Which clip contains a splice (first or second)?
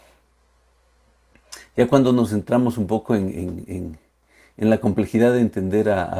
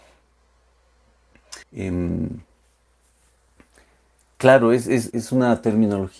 second